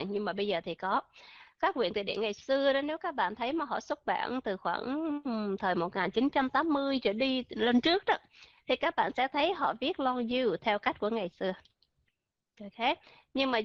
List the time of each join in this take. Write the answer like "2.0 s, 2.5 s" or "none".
none

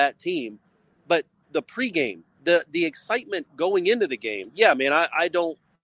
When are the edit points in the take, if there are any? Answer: 2.4 s

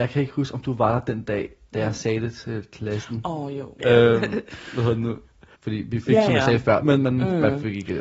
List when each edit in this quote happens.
3.8 s, 5.5 s, 6.8 s

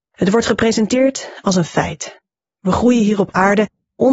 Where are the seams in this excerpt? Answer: none

